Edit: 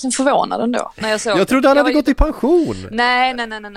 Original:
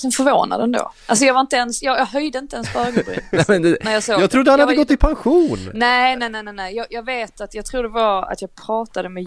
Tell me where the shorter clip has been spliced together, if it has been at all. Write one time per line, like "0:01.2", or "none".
0:01.0

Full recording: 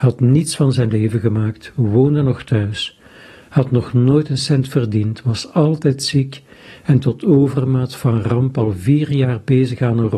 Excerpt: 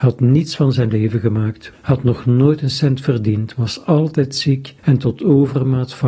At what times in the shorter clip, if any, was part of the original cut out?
0:01.7
0:04.8

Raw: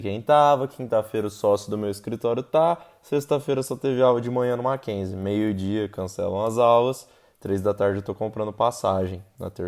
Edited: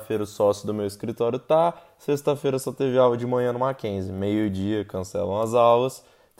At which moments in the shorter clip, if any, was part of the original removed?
none

